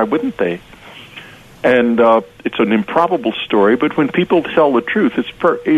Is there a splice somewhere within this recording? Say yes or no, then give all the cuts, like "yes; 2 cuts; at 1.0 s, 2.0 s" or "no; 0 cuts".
no; 0 cuts